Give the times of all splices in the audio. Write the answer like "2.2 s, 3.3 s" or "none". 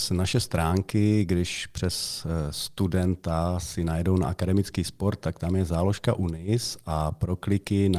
none